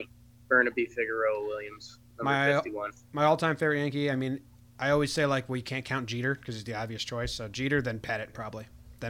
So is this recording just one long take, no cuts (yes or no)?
yes